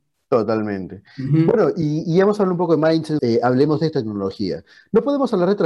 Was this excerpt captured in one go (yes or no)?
no